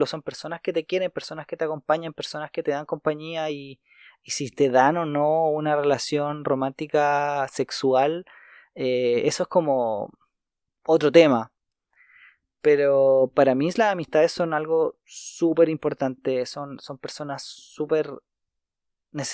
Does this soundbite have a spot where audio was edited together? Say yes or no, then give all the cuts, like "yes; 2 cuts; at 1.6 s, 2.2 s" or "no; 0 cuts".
no; 0 cuts